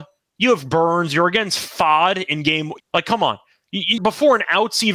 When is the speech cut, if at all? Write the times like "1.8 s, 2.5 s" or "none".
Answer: 2.8 s, 4.0 s